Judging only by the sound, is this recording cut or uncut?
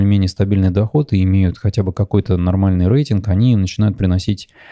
uncut